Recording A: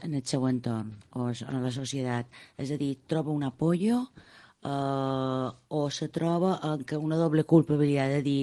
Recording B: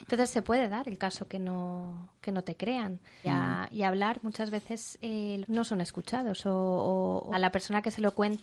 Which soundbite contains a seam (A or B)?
B